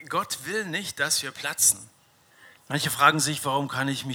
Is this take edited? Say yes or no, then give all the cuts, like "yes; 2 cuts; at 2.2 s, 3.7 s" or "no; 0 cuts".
yes; 1 cut; at 2.6 s